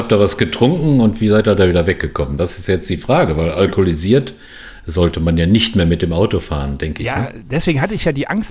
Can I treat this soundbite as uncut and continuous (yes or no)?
yes